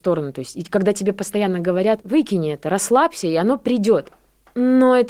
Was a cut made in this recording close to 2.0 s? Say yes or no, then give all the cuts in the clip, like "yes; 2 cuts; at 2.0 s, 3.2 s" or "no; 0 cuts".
yes; 1 cut; at 2.0 s